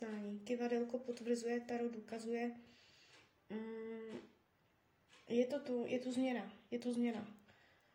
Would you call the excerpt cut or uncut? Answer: uncut